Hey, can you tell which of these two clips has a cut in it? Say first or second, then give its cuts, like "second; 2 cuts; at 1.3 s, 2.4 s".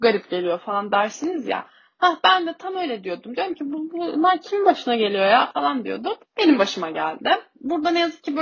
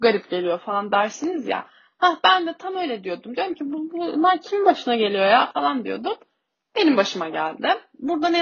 first; 1 cut; at 6.3 s